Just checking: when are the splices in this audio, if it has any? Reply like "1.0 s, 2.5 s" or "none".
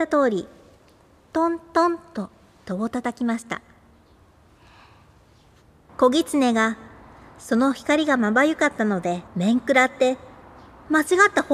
5.9 s, 9.3 s